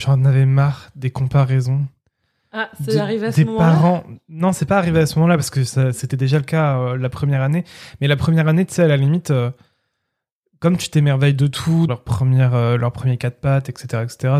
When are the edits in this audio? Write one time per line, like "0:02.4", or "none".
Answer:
0:11.9